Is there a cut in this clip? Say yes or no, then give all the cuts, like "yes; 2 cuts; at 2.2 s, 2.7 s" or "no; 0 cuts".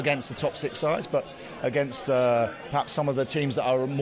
no; 0 cuts